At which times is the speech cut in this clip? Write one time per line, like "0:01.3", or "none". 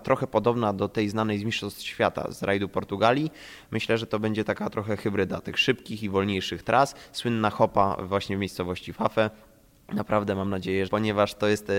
0:10.9